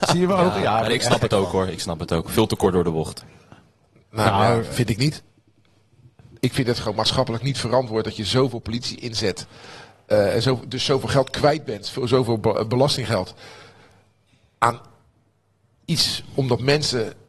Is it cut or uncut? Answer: uncut